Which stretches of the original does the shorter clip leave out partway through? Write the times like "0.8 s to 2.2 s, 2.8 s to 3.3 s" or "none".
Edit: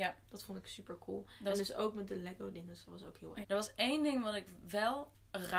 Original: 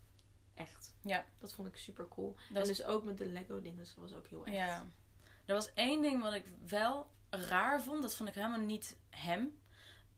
4.5 s to 5.4 s